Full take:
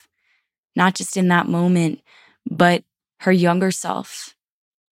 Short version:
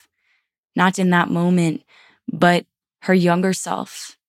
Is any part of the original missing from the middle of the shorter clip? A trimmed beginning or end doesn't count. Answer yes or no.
yes